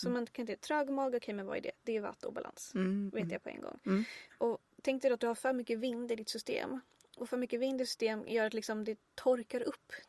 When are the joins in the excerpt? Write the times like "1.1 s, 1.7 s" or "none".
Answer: 4.3 s